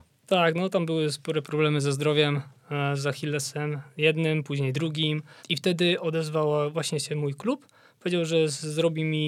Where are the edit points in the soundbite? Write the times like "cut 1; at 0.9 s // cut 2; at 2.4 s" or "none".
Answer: cut 1; at 5.4 s